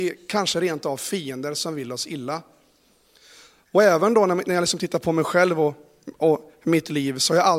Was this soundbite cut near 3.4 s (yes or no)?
no